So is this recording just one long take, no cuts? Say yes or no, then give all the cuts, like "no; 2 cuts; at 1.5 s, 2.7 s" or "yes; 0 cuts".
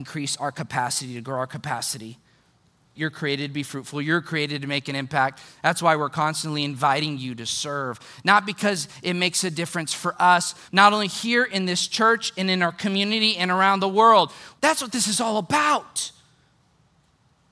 no; 3 cuts; at 3.0 s, 10.7 s, 14.6 s